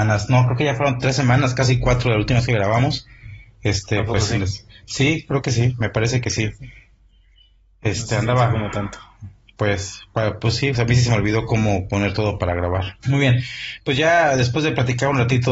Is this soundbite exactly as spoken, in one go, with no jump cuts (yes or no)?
no